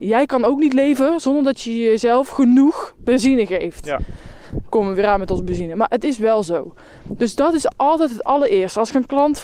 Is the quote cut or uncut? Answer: uncut